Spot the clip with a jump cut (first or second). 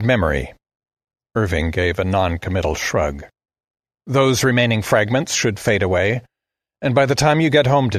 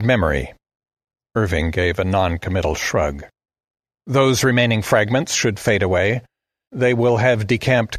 second